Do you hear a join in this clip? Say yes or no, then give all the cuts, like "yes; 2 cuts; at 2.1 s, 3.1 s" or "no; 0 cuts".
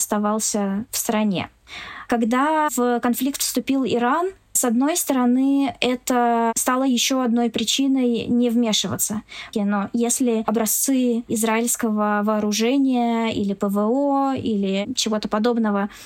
yes; 1 cut; at 9.5 s